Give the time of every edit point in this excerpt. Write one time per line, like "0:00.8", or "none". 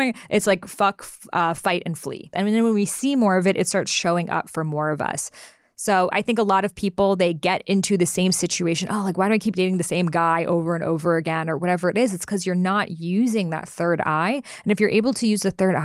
0:02.3